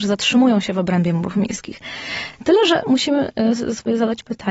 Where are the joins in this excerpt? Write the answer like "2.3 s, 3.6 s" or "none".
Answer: none